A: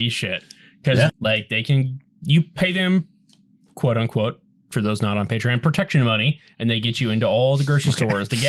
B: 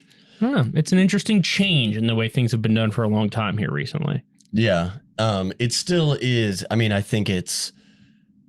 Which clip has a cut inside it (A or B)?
A